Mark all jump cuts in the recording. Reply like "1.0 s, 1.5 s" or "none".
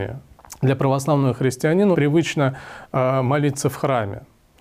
1.9 s